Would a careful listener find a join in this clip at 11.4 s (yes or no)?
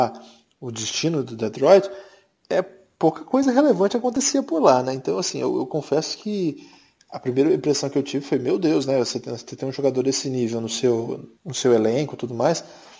yes